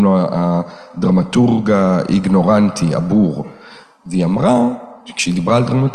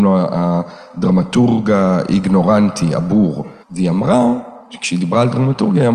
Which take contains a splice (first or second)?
second